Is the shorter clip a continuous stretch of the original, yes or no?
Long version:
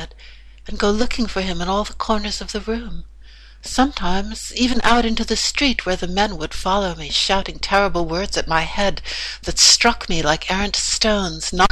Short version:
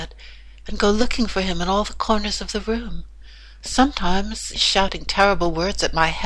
no